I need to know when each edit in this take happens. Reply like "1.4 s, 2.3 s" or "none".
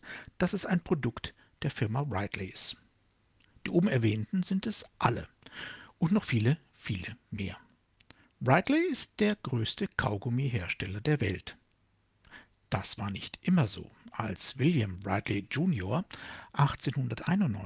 none